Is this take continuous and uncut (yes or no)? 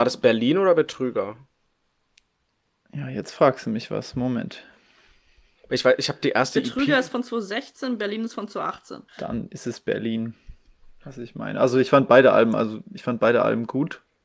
no